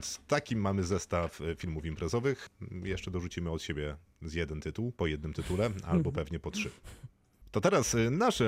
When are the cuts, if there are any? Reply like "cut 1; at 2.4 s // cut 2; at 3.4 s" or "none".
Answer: cut 1; at 4.9 s